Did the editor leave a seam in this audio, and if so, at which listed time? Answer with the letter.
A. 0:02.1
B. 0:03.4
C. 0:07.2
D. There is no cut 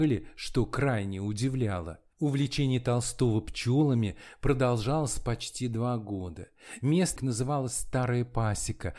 C